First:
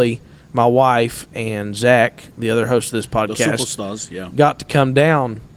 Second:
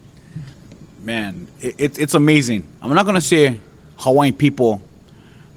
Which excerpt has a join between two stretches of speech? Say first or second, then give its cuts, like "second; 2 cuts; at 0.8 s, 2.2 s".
second; 1 cut; at 2.7 s